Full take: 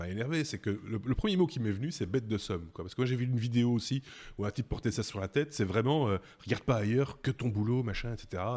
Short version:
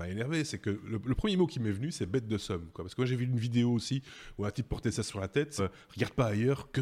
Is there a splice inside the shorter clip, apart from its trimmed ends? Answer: yes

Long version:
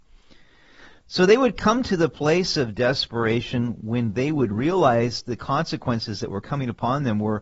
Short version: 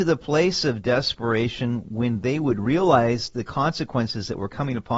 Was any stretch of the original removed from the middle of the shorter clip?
no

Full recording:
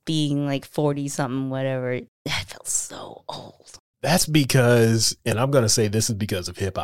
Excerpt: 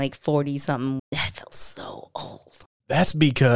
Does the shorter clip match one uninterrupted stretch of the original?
no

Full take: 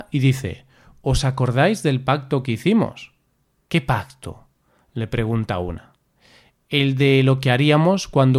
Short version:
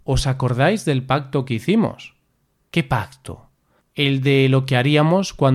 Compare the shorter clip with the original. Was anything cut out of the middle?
yes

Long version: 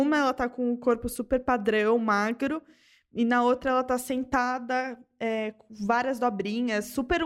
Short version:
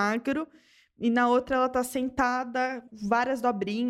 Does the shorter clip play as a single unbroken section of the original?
no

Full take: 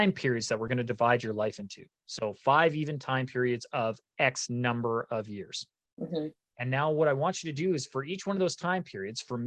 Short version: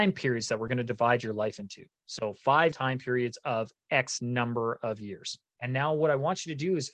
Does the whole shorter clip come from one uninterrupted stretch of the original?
no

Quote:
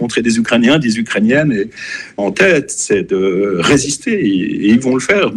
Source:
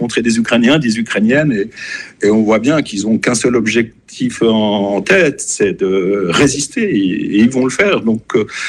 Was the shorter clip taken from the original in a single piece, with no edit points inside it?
no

